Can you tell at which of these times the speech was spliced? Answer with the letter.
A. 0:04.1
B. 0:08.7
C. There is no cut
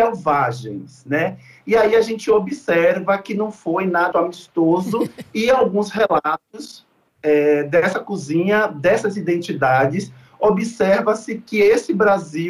A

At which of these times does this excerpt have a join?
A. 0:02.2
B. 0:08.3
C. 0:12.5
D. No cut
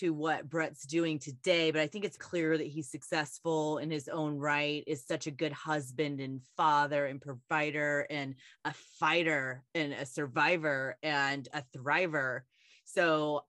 A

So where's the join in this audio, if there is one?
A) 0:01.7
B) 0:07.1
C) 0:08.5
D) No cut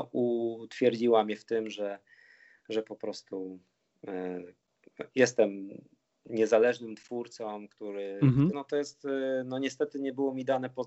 C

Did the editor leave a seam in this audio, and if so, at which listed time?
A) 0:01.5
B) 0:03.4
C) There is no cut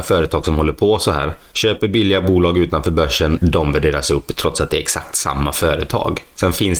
B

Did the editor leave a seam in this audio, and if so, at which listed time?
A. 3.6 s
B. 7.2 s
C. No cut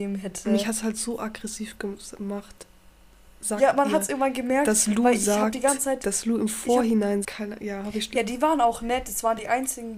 B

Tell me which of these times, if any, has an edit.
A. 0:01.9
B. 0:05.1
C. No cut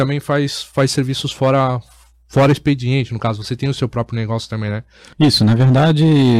B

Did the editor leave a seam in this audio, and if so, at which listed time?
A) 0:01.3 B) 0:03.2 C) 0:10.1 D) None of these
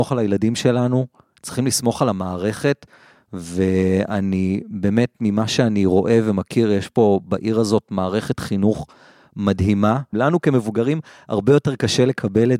C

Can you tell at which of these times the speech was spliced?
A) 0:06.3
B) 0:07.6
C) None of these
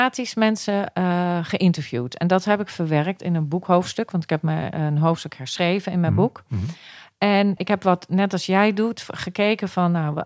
B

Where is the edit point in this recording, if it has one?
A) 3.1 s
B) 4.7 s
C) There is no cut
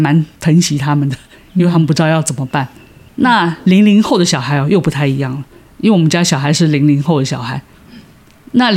C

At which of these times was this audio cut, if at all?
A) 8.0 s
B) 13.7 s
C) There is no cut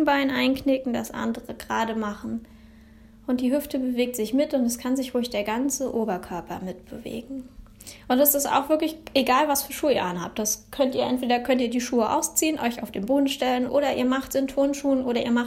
B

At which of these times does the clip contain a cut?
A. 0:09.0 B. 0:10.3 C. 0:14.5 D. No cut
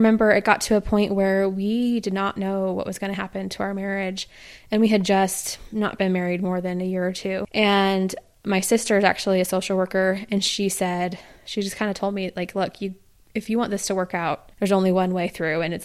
C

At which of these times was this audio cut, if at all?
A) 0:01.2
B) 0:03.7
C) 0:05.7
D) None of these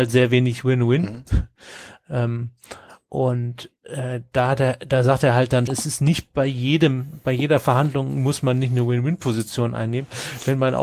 C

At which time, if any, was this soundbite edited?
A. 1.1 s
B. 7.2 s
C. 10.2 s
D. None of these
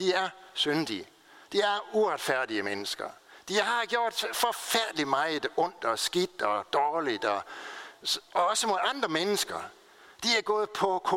D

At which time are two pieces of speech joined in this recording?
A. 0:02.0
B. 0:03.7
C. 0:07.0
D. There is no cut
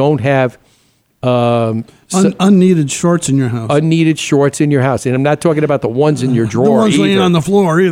D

